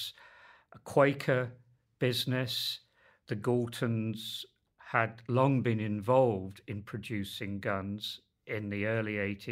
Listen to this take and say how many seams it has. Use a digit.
0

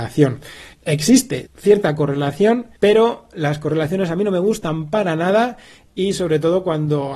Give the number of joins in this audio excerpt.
2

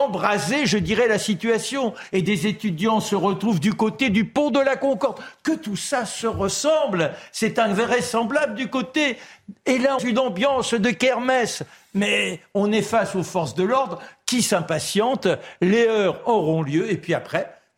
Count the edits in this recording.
1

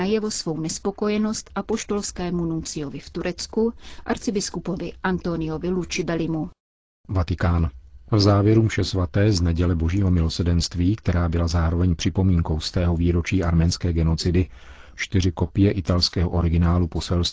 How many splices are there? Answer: 1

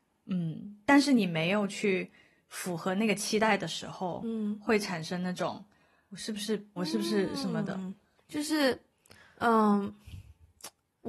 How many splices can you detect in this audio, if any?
2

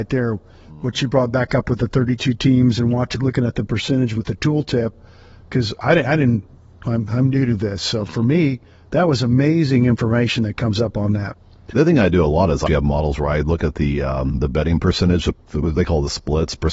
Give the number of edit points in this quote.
1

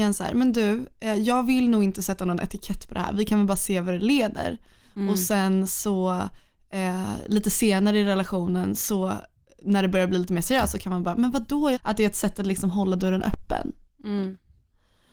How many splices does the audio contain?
1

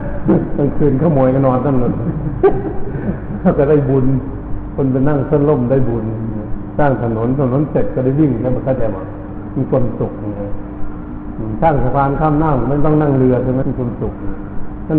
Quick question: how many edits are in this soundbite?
1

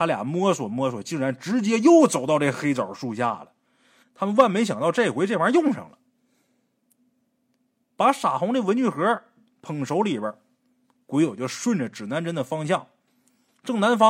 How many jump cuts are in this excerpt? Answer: 1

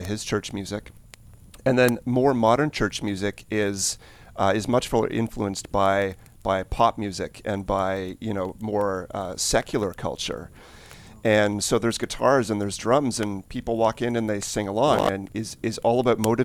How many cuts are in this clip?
1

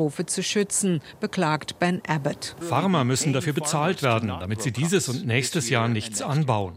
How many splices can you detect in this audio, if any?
1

